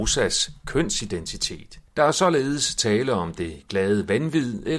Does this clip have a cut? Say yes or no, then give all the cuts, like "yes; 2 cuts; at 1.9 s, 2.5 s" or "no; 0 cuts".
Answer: yes; 1 cut; at 1.9 s